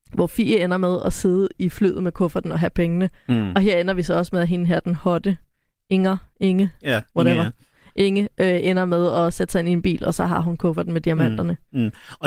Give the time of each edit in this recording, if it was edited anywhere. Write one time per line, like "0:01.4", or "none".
none

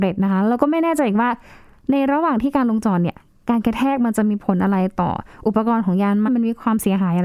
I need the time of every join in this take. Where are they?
0:06.3

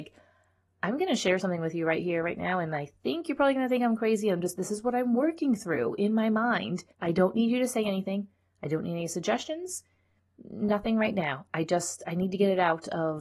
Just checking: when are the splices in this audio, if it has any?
0:06.9

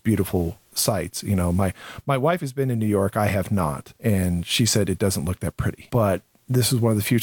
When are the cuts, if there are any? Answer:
0:04.0
0:05.9

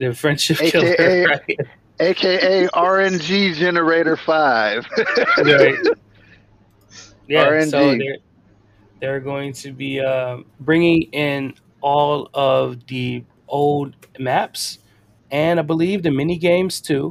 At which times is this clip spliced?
0:10.5
0:15.2

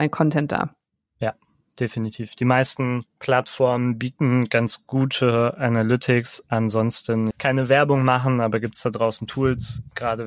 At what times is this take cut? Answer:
0:07.3

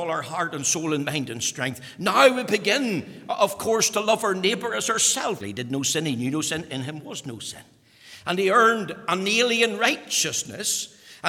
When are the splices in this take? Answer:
0:05.4

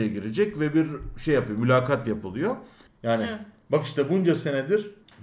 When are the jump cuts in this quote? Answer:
0:02.9

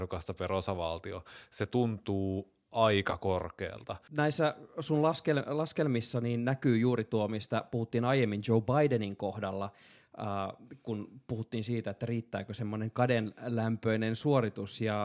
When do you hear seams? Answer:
0:04.1

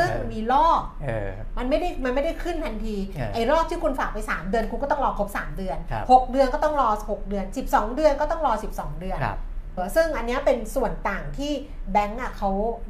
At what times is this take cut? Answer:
0:09.8

